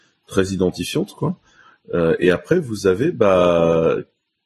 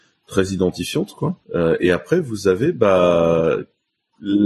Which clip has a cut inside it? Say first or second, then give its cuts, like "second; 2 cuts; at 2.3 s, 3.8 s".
second; 1 cut; at 1.4 s